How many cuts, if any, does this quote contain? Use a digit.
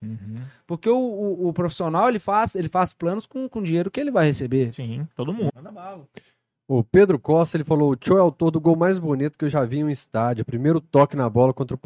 1